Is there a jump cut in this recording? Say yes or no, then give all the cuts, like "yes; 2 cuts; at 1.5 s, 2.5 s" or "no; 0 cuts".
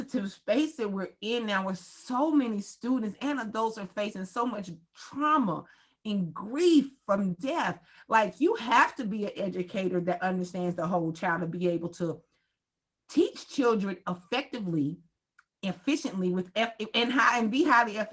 no; 0 cuts